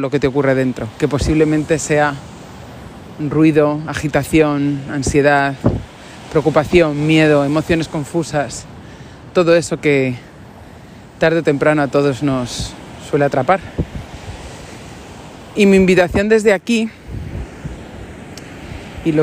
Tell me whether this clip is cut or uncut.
uncut